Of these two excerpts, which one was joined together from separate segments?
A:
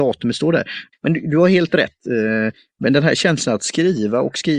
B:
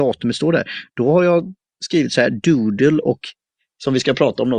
A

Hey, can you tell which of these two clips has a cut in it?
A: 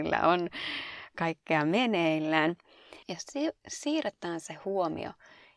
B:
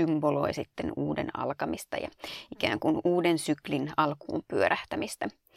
A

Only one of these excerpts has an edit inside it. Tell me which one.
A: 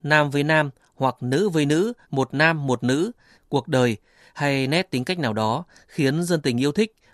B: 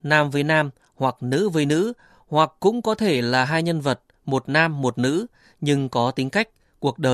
A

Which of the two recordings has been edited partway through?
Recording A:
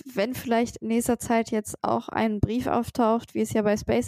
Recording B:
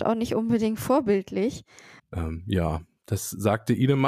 B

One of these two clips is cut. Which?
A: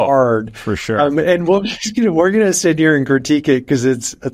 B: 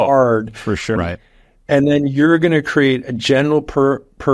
B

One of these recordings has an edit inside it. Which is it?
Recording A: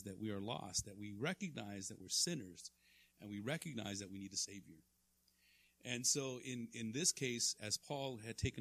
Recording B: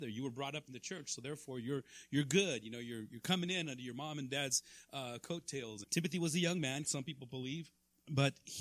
B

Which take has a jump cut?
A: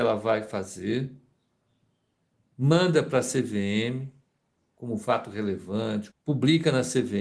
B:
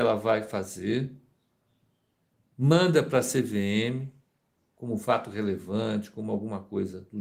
A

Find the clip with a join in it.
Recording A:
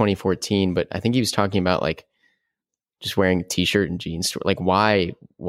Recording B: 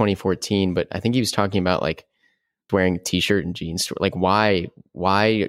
B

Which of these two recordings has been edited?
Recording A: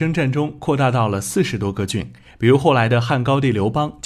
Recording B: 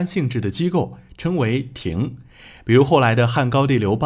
A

